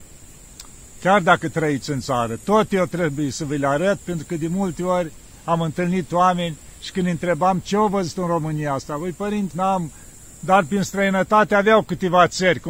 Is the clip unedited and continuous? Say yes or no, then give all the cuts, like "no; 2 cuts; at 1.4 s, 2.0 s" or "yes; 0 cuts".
no; 1 cut; at 9.5 s